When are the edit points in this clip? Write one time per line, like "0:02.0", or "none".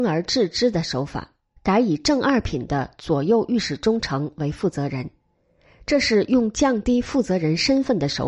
0:01.6